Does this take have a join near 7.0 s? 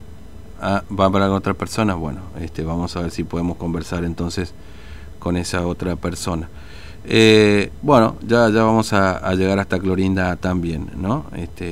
no; 0 cuts

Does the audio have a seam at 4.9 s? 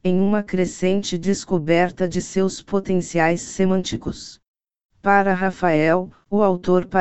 yes; 1 cut; at 4.9 s

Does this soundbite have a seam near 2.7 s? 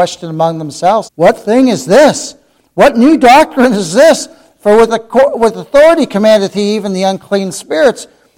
no; 1 cut; at 1.0 s

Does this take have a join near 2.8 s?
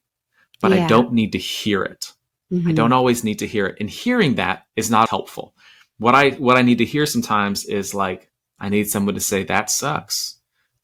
no; 1 cut; at 5.1 s

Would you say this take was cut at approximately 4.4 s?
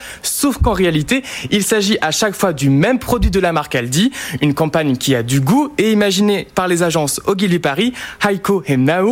no; 0 cuts

